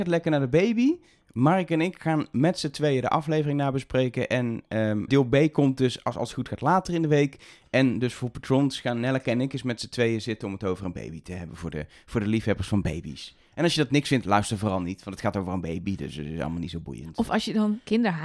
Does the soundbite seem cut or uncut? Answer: cut